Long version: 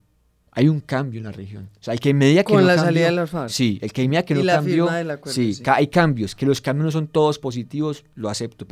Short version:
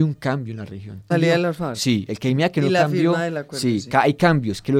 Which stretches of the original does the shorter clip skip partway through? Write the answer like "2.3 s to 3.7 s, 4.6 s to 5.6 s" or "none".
1.8 s to 2.8 s